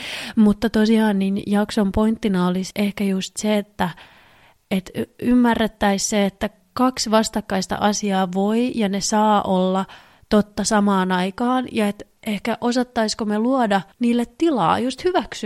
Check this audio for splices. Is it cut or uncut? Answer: cut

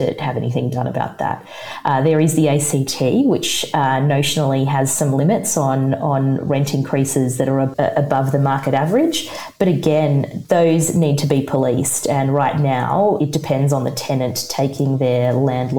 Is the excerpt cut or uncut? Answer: cut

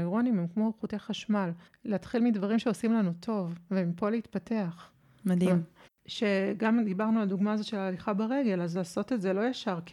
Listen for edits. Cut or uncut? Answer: cut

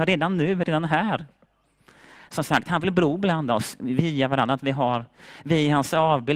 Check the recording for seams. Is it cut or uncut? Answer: uncut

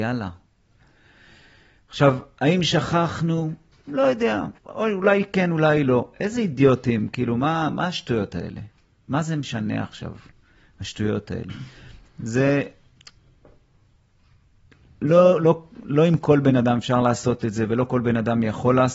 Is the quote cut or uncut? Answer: cut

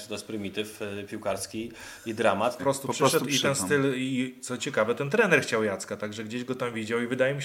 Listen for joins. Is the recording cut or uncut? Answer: cut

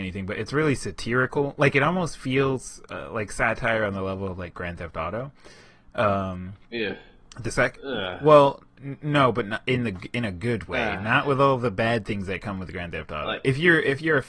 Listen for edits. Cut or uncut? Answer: uncut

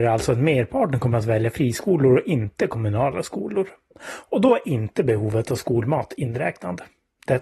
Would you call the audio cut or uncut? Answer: cut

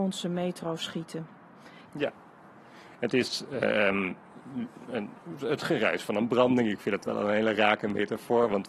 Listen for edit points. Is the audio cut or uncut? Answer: cut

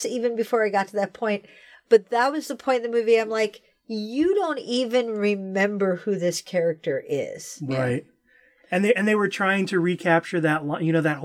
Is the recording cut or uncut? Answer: uncut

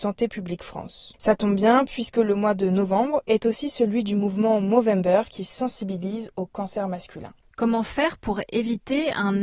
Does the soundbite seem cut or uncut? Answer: uncut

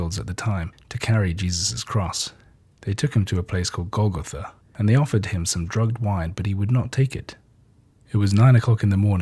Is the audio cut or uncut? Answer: cut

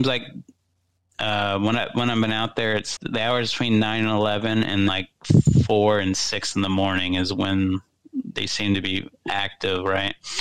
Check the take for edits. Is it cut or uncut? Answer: cut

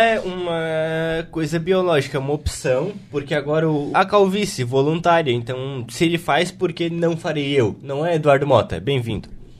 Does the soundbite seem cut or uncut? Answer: cut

